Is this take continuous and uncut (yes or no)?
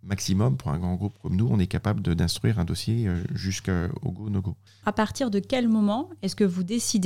no